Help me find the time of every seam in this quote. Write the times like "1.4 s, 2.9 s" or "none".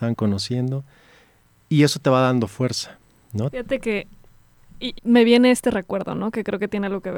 3.5 s, 5.0 s